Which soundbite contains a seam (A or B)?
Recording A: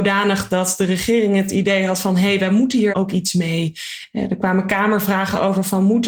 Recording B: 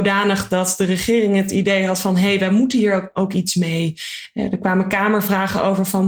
A